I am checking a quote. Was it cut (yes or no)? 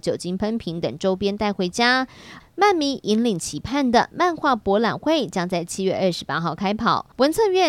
yes